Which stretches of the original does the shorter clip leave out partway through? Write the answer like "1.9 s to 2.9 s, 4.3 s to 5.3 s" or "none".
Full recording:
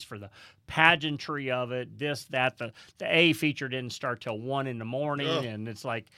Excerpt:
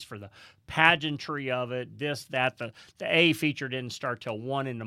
none